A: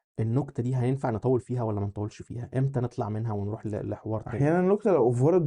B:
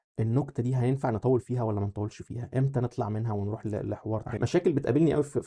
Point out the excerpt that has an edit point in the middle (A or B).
B